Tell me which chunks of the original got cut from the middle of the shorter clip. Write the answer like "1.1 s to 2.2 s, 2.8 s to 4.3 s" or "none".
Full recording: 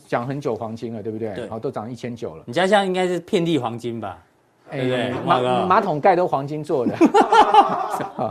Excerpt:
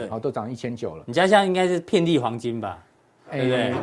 none